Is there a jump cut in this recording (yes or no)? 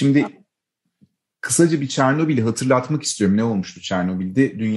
no